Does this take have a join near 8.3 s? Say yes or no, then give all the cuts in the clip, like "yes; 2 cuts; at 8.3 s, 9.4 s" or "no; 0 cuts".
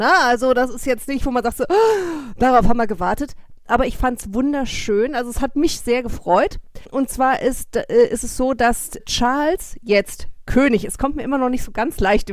no; 0 cuts